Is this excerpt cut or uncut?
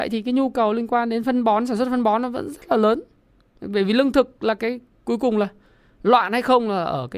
uncut